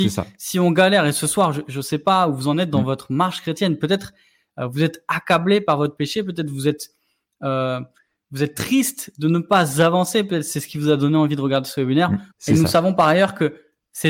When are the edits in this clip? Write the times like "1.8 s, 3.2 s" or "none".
12.3 s